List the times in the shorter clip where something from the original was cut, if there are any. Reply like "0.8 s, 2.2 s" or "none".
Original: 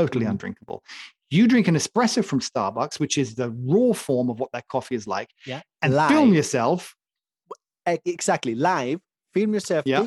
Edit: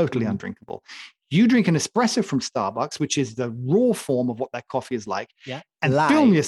none